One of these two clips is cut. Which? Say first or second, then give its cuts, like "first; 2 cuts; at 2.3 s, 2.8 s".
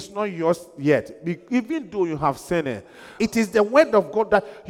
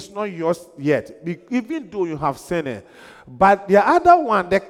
first; 1 cut; at 3.2 s